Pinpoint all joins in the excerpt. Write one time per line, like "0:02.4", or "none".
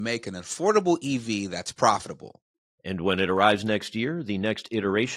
0:02.6

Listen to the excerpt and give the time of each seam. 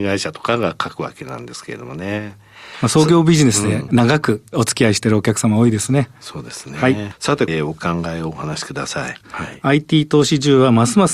0:07.5
0:09.2

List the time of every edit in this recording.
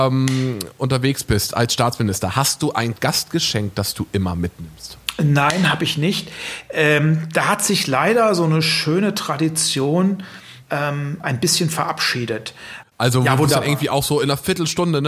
0:10.6
0:12.8

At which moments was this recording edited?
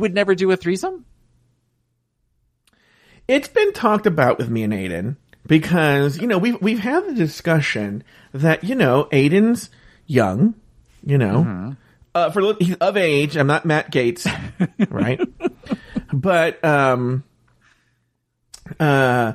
none

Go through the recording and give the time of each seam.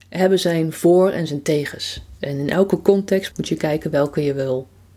0:03.3

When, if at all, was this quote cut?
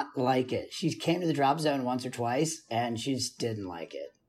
0:03.4

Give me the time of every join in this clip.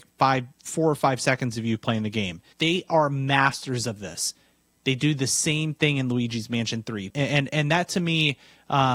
0:02.5
0:07.1

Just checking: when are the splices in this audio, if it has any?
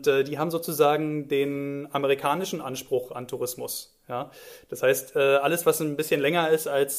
none

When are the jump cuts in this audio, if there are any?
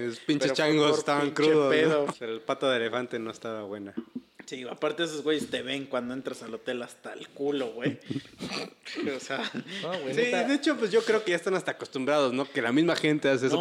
0:02.1

